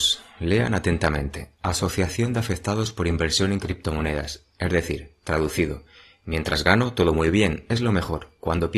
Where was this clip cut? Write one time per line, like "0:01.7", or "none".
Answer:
none